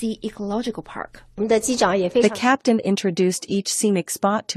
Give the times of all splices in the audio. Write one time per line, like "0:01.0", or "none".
none